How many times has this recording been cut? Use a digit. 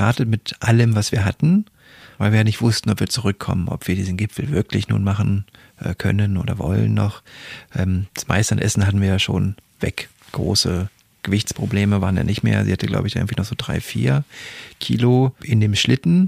1